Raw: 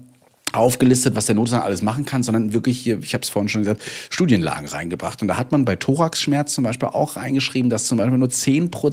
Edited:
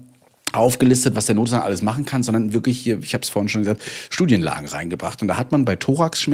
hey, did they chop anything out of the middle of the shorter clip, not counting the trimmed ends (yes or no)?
no